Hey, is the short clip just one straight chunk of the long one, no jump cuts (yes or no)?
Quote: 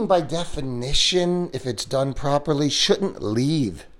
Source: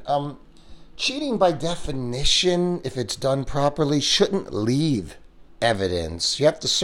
yes